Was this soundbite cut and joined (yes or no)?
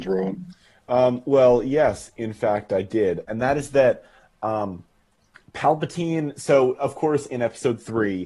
yes